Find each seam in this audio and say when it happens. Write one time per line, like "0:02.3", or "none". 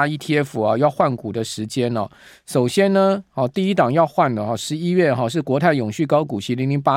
none